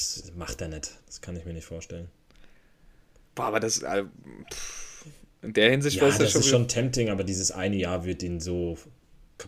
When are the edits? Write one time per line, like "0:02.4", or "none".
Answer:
none